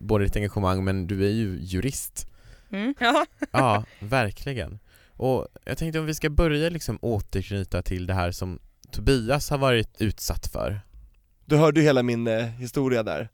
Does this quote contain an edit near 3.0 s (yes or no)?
yes